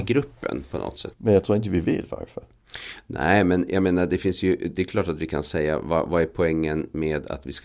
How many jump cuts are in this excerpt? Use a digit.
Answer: 1